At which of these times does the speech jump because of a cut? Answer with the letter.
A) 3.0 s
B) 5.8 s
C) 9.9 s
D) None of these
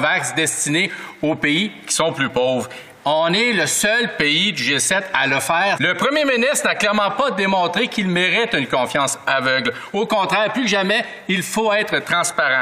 B